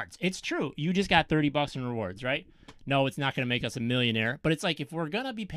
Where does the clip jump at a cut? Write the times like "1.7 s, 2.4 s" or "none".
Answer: none